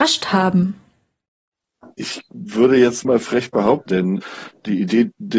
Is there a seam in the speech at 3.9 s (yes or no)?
yes